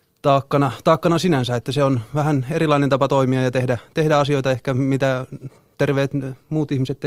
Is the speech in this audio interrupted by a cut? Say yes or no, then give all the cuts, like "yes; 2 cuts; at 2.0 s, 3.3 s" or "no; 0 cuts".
no; 0 cuts